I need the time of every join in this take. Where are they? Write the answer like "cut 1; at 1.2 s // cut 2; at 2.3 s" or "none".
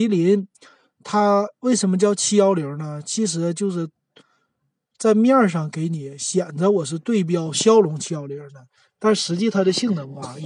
none